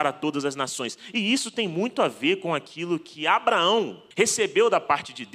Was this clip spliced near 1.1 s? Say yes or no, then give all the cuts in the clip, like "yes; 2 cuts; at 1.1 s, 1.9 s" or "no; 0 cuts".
no; 1 cut; at 4.1 s